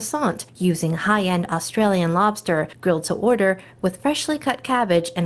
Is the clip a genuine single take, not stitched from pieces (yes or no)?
yes